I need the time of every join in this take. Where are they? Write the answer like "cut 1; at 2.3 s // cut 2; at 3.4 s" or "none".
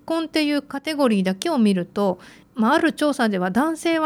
none